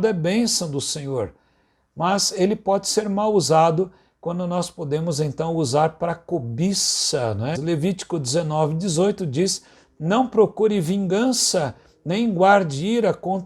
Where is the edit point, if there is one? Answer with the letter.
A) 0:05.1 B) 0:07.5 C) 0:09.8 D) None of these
B